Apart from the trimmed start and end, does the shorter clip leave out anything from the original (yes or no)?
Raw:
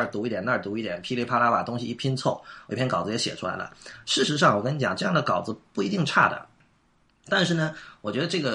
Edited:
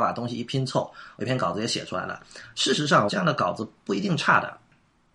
yes